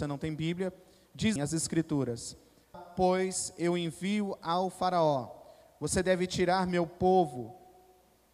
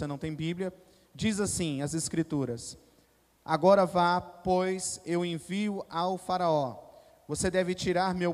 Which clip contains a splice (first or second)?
first